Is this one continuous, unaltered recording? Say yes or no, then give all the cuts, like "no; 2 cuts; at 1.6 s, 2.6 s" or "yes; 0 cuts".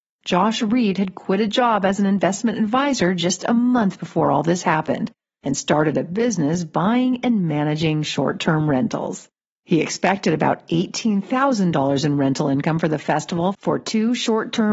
yes; 0 cuts